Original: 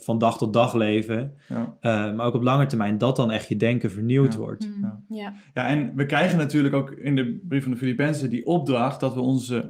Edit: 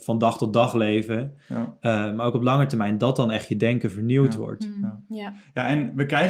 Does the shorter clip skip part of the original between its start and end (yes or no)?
no